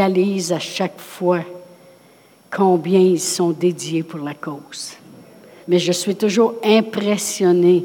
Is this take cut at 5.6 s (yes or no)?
yes